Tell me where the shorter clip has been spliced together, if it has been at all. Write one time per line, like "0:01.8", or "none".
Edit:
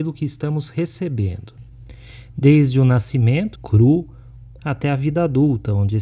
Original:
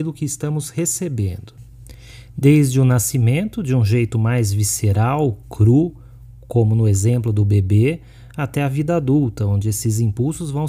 0:03.6
0:04.6